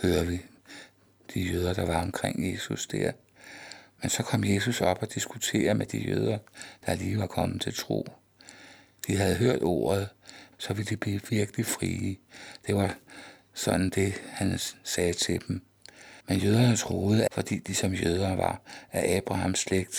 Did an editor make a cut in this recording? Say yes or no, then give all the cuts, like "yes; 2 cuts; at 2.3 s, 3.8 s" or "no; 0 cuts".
yes; 3 cuts; at 10.5 s, 16.2 s, 17.3 s